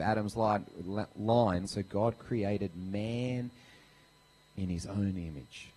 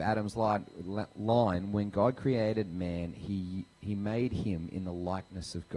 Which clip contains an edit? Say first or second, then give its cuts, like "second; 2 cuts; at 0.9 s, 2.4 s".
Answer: first; 1 cut; at 1.7 s